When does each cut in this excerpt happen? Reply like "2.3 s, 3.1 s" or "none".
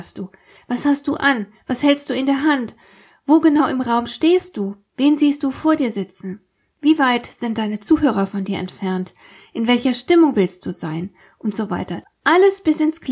none